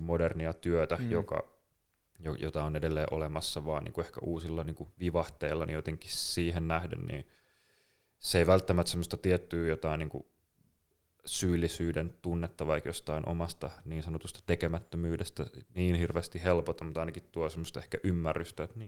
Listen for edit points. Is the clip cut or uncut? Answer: uncut